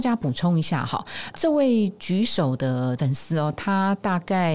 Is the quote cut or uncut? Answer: uncut